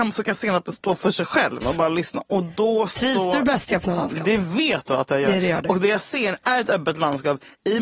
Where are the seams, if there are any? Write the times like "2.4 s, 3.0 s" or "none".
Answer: 1.6 s